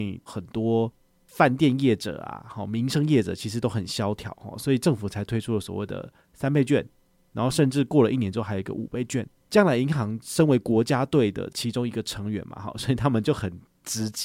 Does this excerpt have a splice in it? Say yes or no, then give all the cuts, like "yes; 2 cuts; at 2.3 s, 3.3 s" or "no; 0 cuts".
yes; 1 cut; at 9.3 s